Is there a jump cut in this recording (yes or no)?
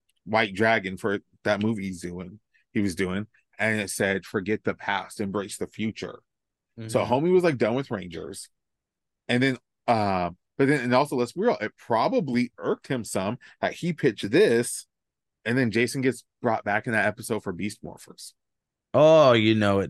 no